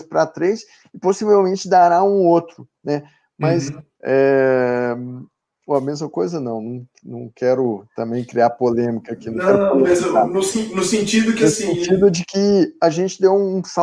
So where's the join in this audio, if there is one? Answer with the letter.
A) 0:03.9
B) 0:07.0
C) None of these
A